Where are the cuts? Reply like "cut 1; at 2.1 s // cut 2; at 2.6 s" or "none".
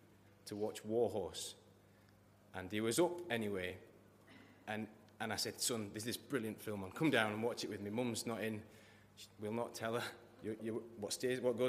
cut 1; at 10.6 s